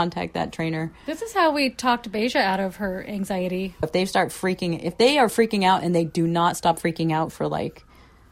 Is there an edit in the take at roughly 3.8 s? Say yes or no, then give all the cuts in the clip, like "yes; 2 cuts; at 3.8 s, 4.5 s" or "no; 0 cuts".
yes; 1 cut; at 3.8 s